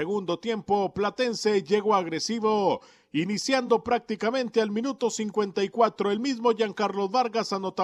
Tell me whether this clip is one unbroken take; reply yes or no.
yes